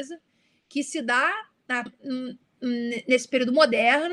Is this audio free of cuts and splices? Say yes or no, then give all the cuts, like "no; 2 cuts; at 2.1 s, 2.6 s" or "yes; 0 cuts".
no; 1 cut; at 1.9 s